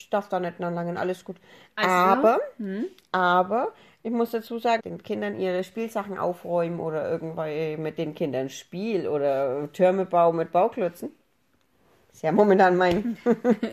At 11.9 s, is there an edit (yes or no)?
no